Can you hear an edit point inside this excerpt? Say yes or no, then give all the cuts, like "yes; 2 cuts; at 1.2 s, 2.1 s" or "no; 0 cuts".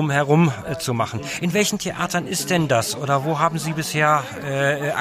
no; 0 cuts